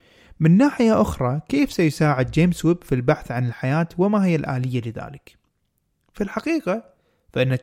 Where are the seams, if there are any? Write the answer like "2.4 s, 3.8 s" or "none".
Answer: none